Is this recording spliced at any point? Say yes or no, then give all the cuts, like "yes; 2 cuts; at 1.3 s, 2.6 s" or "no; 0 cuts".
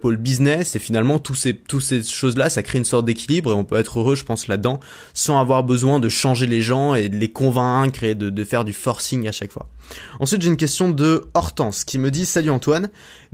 no; 0 cuts